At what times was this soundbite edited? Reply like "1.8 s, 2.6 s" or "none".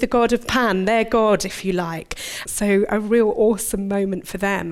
2.4 s

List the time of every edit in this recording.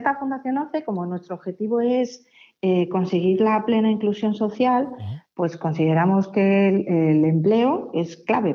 none

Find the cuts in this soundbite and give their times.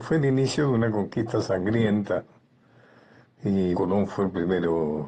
3.7 s

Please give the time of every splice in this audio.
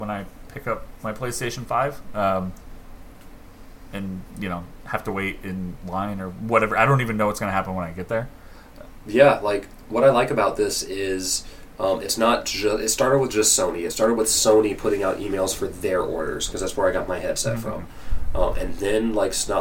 none

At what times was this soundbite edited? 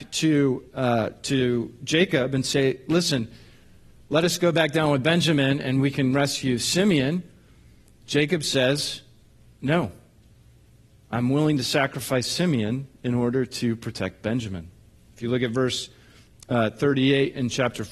none

